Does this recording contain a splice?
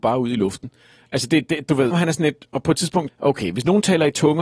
yes; 2 cuts; at 1.9 s, 3.1 s

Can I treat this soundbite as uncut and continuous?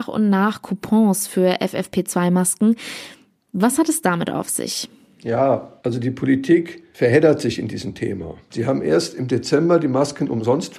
yes; 0 cuts

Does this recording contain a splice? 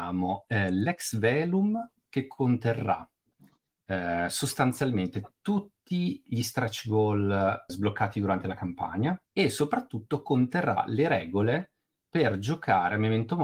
yes; 2 cuts; at 7.7 s, 9.3 s

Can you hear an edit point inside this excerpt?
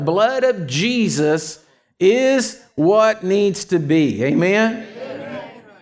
no; 0 cuts

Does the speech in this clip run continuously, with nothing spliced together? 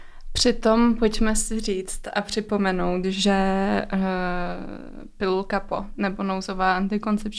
yes; 0 cuts

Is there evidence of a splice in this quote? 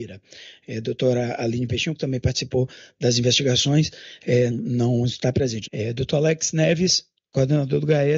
yes; 2 cuts; at 4.5 s, 5.7 s

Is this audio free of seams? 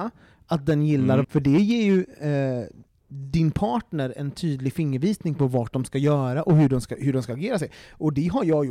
no; 1 cut; at 1.2 s

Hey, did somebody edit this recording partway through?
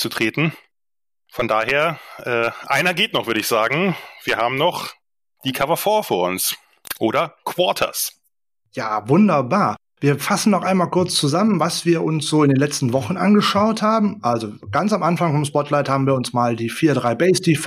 no; 0 cuts

